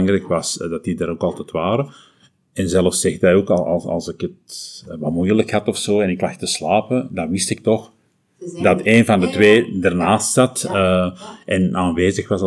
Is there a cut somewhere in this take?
no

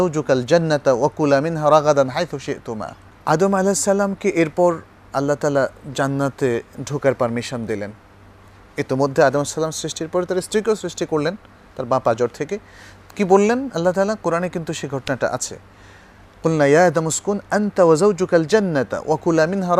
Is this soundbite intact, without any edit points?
yes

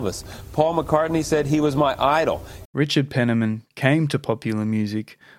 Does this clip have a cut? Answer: yes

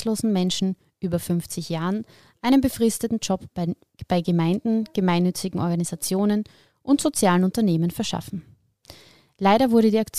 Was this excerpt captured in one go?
yes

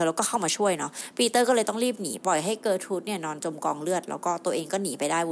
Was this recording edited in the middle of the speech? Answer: yes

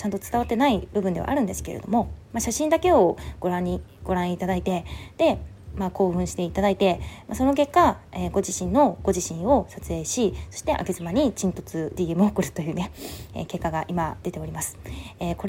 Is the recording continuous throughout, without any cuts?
no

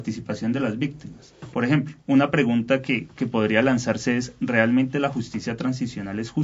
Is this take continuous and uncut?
no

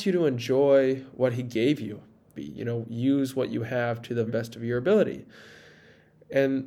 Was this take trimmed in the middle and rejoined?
yes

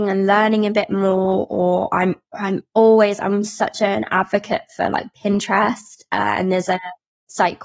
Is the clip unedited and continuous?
yes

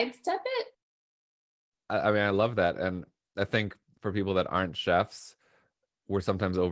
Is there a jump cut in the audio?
no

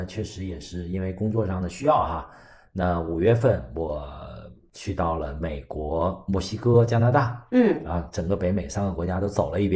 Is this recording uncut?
yes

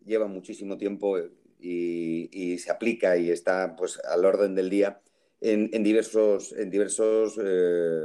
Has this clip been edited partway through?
no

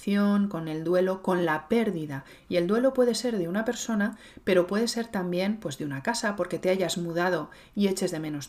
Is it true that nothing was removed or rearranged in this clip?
yes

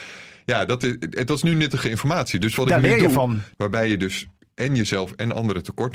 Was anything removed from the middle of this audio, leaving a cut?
yes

